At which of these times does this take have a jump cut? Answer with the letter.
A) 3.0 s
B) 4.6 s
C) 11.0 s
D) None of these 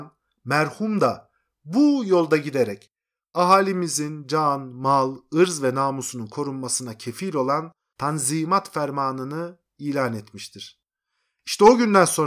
D